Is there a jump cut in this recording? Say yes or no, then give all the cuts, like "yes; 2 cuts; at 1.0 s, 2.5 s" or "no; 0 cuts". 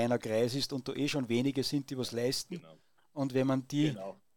no; 0 cuts